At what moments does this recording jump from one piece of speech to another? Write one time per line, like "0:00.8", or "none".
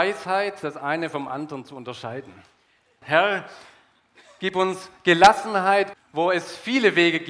0:03.0
0:05.9